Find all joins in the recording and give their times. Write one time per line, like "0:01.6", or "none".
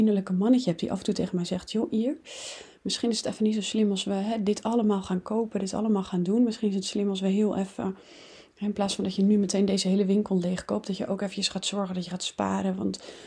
none